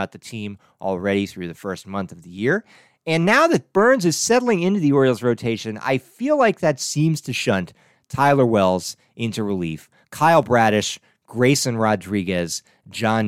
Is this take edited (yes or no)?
yes